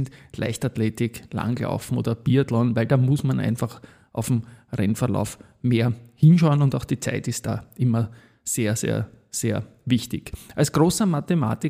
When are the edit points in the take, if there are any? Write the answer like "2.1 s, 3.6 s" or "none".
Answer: none